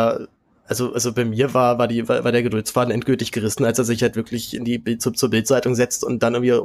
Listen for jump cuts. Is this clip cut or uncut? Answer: cut